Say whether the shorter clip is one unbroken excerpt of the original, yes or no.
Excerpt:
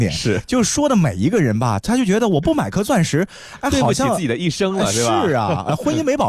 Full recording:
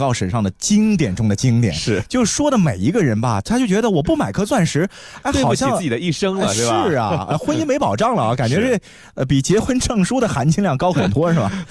yes